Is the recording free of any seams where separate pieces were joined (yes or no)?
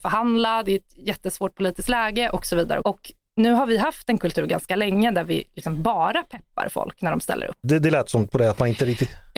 no